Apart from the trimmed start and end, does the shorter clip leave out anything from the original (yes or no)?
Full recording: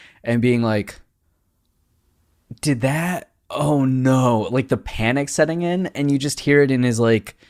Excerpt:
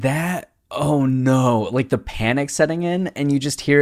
no